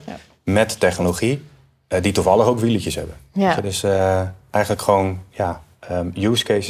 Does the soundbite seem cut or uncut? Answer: uncut